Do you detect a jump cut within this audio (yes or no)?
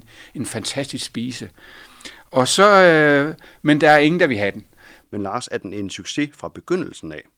yes